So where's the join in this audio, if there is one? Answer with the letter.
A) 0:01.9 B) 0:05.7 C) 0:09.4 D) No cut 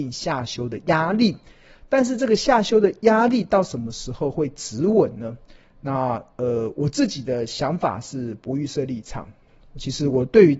D